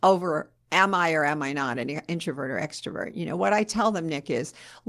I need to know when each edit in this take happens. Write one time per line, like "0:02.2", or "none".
none